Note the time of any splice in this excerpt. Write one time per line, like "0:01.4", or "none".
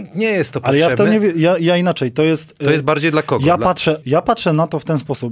0:04.0

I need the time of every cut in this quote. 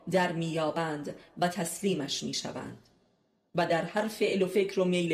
none

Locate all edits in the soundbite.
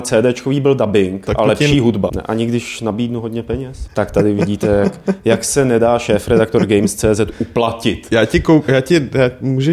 0:02.1
0:03.9

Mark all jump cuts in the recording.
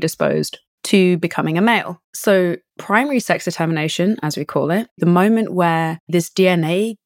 none

